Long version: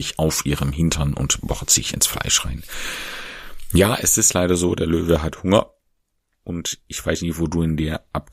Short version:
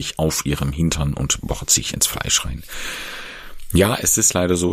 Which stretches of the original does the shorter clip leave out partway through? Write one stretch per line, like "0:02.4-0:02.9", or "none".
none